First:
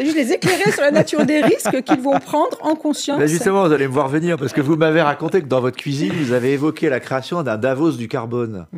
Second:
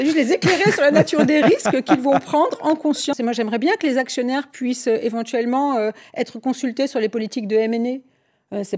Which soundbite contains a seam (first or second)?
second